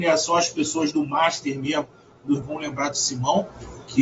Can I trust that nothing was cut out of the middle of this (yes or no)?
no